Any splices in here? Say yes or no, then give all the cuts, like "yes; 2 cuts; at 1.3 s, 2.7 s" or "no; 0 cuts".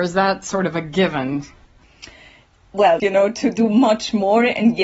yes; 1 cut; at 3.0 s